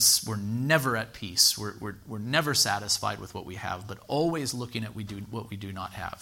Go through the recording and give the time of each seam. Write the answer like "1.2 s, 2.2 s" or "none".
none